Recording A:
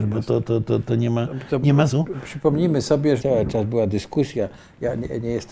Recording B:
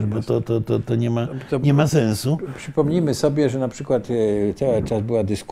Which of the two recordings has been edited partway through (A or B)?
A